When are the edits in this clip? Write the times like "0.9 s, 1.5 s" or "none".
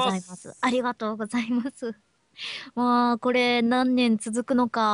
none